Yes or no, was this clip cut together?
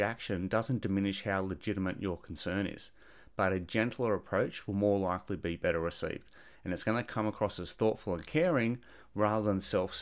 no